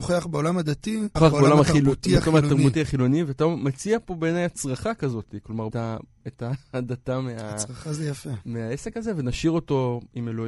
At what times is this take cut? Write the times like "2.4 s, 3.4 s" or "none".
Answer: 1.2 s, 5.7 s